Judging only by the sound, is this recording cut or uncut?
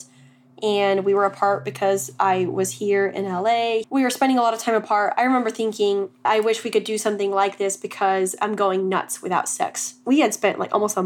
cut